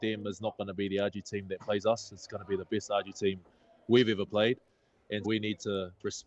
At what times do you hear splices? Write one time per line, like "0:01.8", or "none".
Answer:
0:05.2